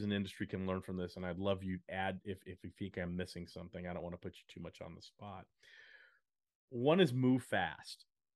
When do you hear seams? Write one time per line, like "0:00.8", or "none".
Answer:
none

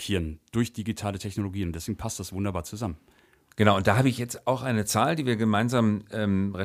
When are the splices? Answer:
none

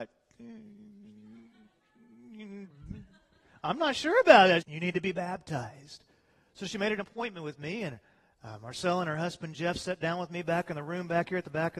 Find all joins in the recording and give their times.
0:04.6

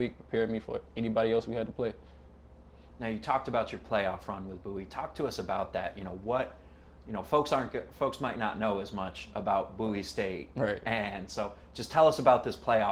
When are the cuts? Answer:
none

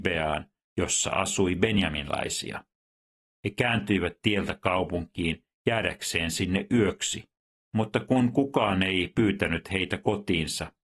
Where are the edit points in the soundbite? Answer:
none

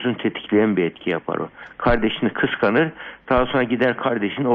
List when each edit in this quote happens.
none

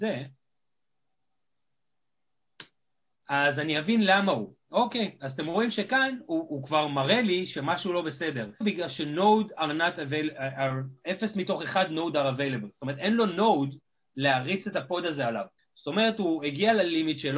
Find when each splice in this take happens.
0:08.6
0:15.6

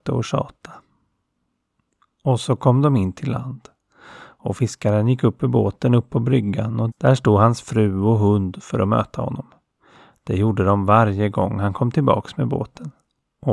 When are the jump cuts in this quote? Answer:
0:06.9

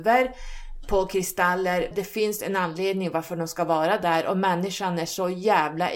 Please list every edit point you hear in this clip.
0:01.9

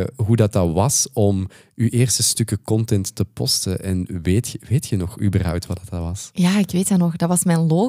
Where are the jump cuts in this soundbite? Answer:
none

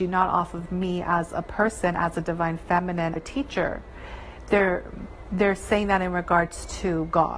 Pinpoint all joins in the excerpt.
0:03.2

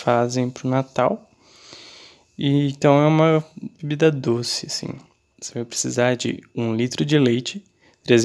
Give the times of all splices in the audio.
0:05.3

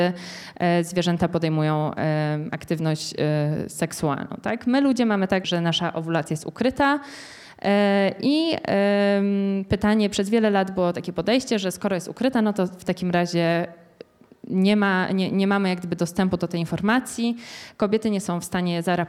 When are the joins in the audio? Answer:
0:05.4

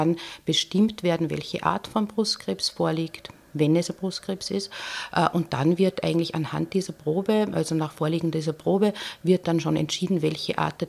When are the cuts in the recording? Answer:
none

